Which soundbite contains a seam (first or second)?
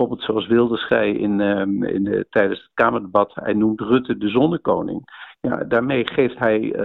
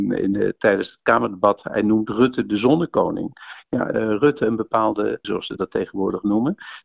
second